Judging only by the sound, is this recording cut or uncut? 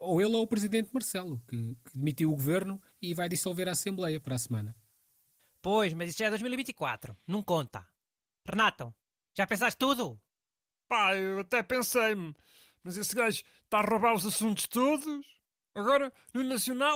uncut